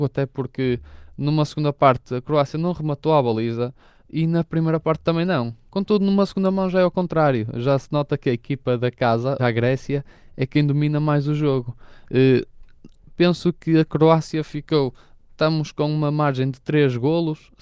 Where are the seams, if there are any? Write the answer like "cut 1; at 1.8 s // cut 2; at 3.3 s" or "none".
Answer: cut 1; at 5.7 s // cut 2; at 9.4 s